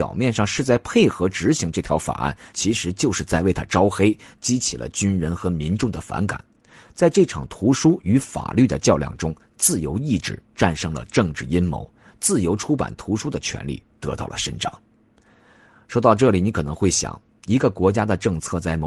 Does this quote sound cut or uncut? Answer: cut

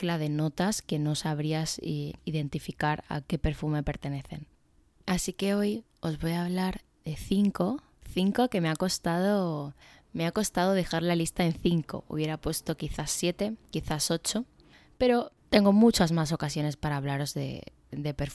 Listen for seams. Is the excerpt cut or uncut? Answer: uncut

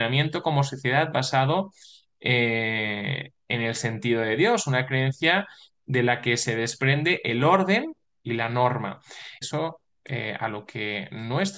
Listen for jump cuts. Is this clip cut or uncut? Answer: cut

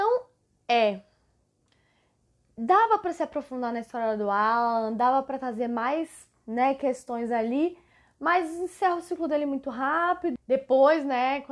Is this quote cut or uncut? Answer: cut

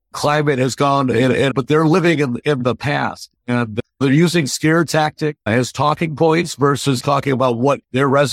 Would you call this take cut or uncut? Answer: cut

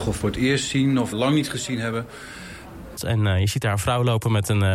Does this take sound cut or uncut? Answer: cut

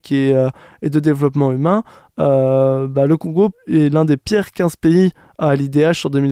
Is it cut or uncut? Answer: uncut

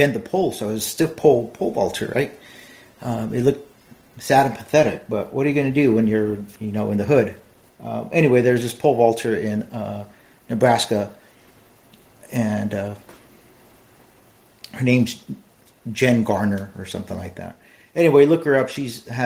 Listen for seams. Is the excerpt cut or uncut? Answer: cut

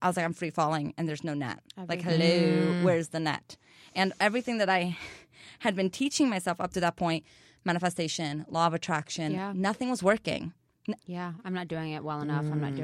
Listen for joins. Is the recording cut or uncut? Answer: cut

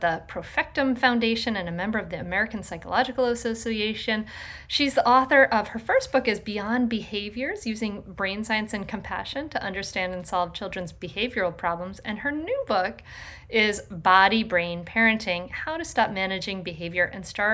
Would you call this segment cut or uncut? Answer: uncut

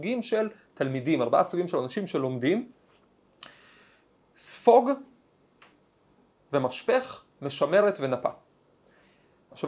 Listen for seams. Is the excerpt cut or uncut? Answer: uncut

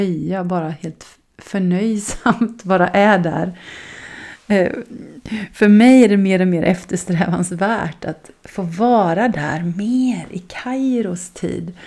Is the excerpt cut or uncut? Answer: uncut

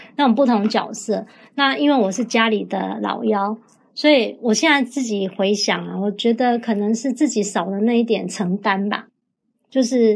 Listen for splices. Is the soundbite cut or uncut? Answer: uncut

